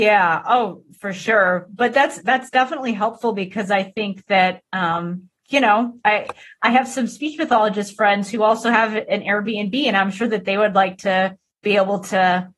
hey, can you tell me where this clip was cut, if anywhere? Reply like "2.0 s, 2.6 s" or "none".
none